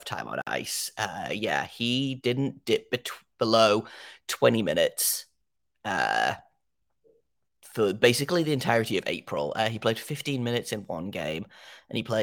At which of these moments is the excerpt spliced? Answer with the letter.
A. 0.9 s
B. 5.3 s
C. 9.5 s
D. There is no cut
D